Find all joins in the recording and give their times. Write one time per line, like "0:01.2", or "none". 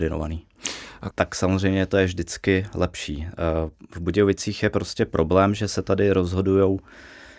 0:01.1